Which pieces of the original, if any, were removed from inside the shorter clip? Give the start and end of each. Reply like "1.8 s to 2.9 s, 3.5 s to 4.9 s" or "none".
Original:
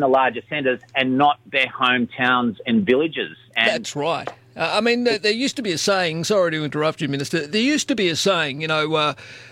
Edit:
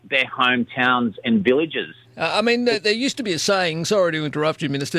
3.5 s to 4.4 s